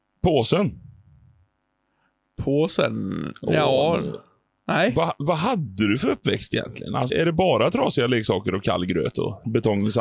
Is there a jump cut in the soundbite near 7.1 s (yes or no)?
yes